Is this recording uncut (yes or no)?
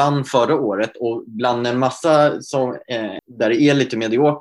no